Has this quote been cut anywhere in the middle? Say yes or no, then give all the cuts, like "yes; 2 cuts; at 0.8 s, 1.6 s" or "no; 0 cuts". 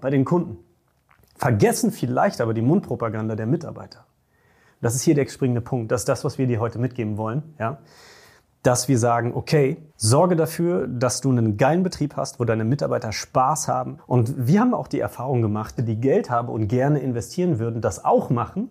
yes; 3 cuts; at 9.9 s, 14.0 s, 15.8 s